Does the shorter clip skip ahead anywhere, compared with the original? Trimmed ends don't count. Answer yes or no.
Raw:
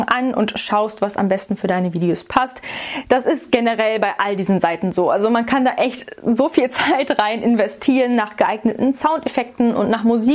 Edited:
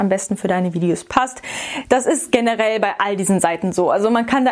no